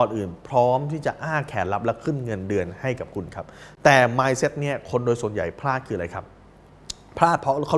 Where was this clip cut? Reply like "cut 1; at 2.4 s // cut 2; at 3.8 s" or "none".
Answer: none